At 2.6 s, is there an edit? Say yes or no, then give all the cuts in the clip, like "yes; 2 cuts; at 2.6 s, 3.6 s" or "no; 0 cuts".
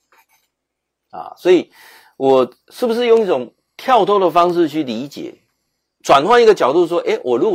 yes; 1 cut; at 2.6 s